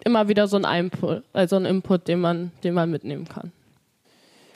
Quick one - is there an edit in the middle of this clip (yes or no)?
no